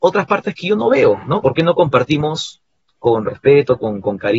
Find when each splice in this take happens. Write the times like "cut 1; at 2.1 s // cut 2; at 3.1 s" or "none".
cut 1; at 1.4 s